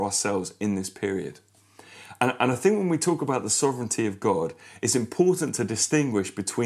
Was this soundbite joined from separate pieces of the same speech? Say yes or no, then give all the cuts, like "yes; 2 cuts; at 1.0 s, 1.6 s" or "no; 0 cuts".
no; 0 cuts